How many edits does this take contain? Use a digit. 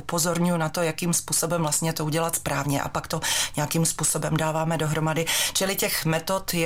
0